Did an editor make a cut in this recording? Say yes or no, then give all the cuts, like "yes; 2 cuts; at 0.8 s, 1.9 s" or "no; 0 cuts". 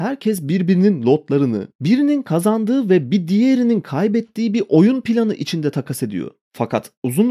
yes; 1 cut; at 1.7 s